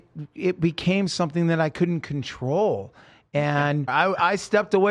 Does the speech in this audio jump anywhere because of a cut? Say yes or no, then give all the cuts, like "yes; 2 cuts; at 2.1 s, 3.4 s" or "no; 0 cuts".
yes; 1 cut; at 3.9 s